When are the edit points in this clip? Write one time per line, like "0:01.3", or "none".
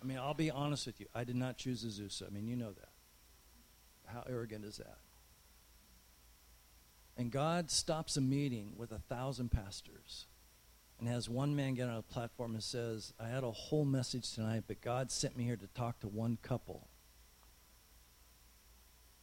0:04.0

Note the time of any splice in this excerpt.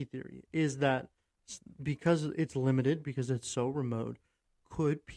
0:03.0

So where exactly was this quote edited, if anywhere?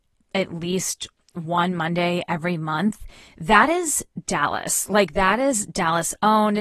none

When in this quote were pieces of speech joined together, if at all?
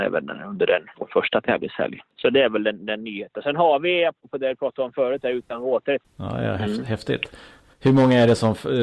0:06.0

